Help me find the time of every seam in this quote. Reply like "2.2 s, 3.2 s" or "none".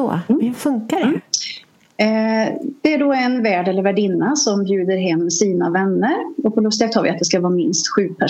none